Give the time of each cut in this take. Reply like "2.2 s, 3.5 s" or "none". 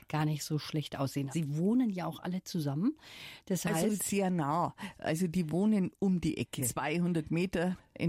1.3 s, 6.6 s